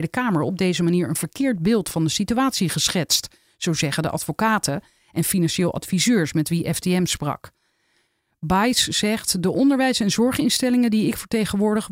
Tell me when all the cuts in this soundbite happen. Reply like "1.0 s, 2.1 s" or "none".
none